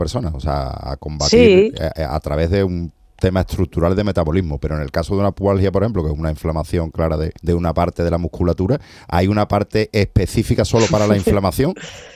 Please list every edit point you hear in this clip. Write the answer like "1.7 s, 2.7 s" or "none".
7.4 s